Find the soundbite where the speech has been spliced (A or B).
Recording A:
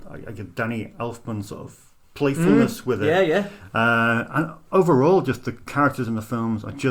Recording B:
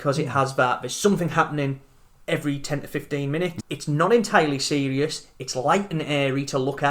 B